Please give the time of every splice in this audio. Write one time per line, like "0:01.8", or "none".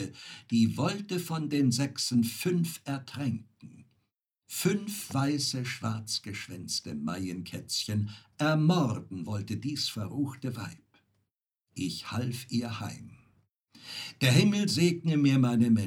none